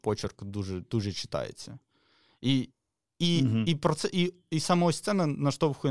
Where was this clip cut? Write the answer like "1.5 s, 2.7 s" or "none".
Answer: none